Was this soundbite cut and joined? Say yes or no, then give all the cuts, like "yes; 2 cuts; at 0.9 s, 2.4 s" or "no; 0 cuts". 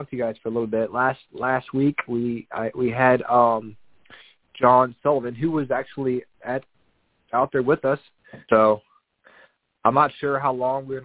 yes; 1 cut; at 8.5 s